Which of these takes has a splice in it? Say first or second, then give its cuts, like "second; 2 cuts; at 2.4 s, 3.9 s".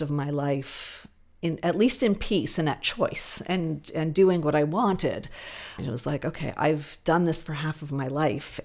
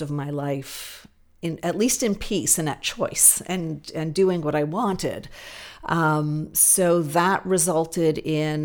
first; 1 cut; at 5.8 s